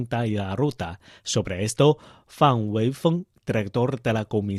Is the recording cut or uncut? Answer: uncut